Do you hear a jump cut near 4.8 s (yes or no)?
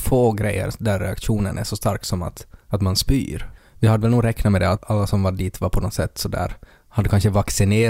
yes